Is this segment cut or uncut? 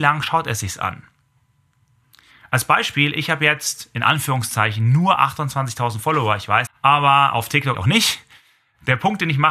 cut